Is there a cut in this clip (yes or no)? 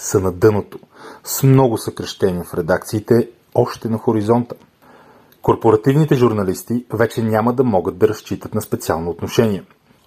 no